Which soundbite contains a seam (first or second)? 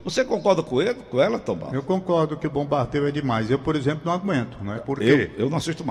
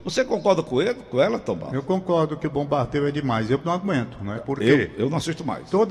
second